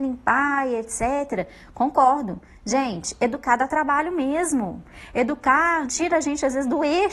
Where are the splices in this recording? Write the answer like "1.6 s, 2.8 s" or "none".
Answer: 5.9 s